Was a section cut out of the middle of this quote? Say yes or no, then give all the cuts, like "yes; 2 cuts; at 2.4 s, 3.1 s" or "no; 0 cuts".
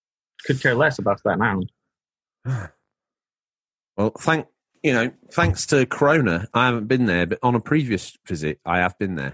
no; 0 cuts